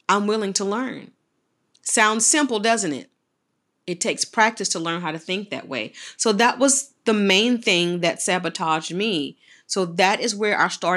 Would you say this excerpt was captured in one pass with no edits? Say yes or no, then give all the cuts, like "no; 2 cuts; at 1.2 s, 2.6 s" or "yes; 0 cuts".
no; 2 cuts; at 1.6 s, 3.7 s